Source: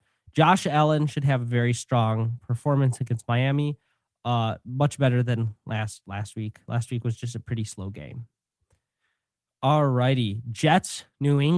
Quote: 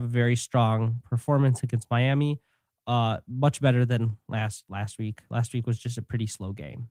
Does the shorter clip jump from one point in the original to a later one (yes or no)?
no